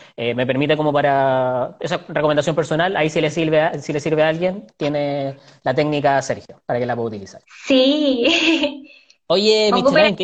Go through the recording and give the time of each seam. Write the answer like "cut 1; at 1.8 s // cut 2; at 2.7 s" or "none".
none